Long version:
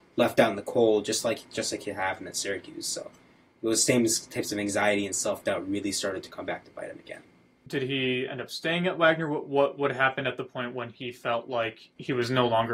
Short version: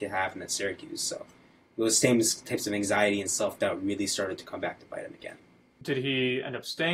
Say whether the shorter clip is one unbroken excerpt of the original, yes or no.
yes